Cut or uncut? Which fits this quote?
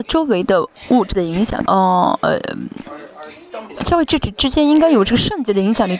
cut